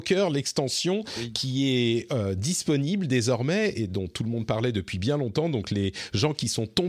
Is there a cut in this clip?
no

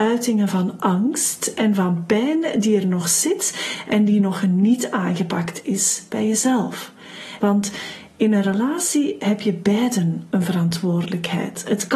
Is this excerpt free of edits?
no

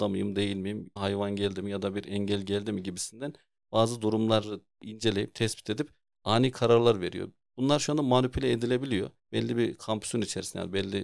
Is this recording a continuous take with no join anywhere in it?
no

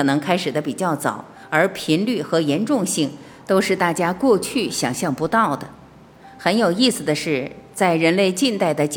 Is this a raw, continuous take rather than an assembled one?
yes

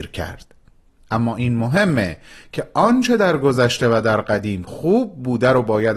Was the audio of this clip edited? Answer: no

